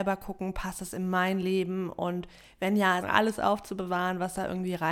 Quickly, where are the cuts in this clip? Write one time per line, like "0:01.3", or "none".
0:03.0